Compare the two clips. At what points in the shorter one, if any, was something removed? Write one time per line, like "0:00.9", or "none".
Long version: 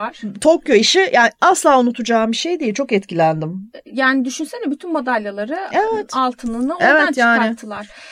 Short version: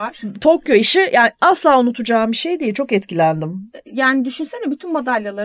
none